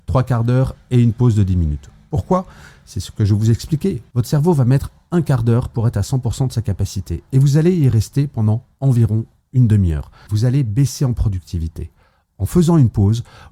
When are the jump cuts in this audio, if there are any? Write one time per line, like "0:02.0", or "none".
0:10.3